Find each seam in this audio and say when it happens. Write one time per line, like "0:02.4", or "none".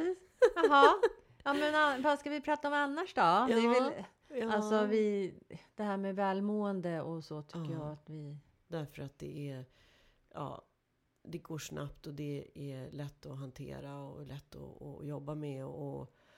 0:08.7